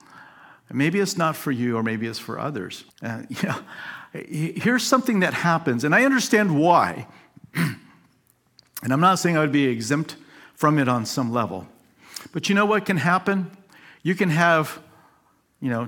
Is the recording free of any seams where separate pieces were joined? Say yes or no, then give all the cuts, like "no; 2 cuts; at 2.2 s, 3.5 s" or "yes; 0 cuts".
no; 1 cut; at 2.9 s